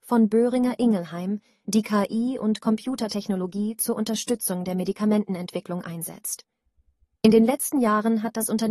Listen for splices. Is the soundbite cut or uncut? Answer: uncut